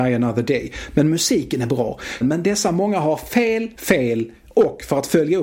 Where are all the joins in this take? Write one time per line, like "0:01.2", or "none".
0:02.2
0:03.8